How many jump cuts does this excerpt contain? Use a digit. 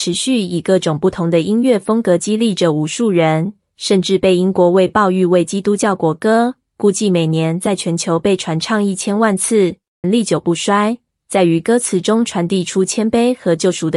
1